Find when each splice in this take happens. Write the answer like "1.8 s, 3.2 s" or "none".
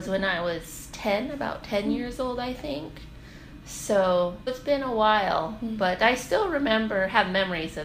4.5 s